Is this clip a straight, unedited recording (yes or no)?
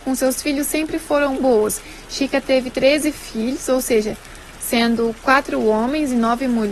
no